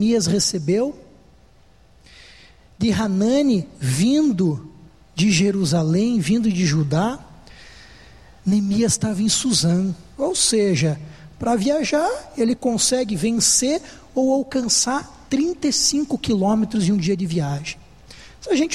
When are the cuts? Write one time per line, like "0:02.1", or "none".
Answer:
0:10.1